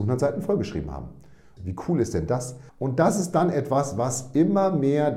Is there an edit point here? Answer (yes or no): yes